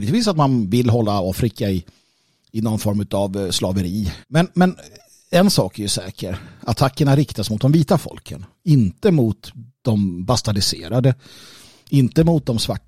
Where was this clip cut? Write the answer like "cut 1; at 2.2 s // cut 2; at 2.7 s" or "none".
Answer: cut 1; at 4.2 s